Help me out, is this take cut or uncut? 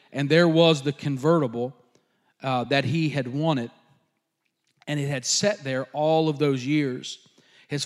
uncut